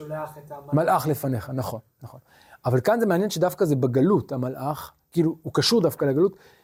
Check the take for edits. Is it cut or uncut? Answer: uncut